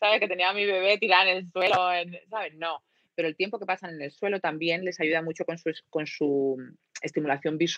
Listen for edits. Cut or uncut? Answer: uncut